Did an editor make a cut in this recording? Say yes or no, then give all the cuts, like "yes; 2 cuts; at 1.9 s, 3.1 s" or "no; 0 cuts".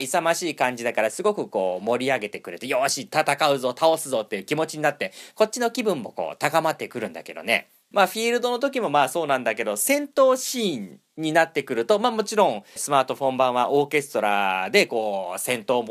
yes; 2 cuts; at 7.9 s, 12.8 s